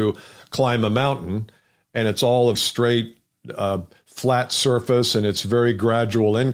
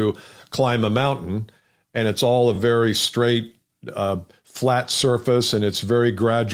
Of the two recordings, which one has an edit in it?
first; 1 cut; at 2.6 s

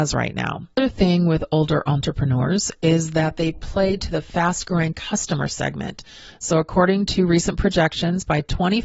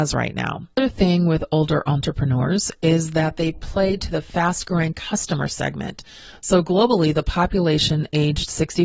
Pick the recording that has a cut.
first; 1 cut; at 6.3 s

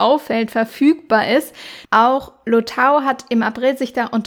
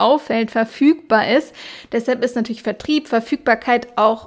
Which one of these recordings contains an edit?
first; 1 cut; at 1.8 s

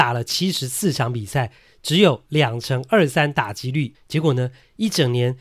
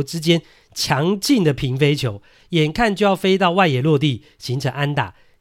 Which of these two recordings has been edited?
first; 1 cut; at 3.9 s

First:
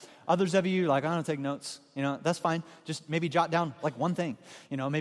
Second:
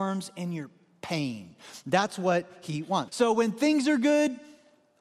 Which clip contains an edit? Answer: second; 1 cut; at 3.1 s

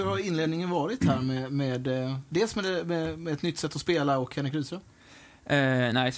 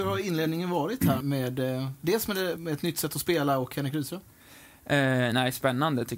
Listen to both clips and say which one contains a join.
second; 2 cuts; at 1.2 s, 2.6 s

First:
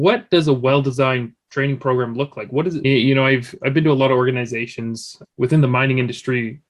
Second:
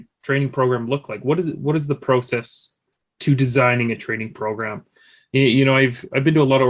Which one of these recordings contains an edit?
first; 2 cuts; at 2.8 s, 5.2 s

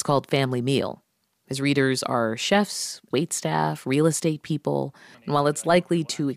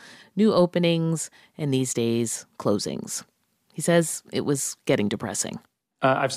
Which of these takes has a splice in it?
first; 2 cuts; at 3.1 s, 5.1 s

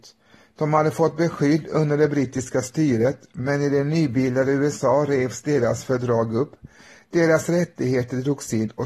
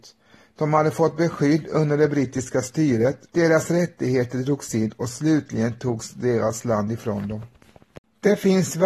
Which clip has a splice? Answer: second; 1 cut; at 3.3 s

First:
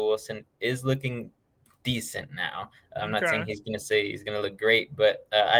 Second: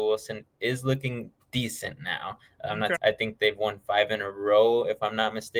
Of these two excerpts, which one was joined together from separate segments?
second; 2 cuts; at 1.4 s, 2.9 s

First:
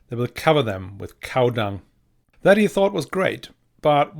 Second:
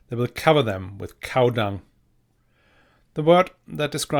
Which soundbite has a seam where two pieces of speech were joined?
first; 1 cut; at 2.2 s

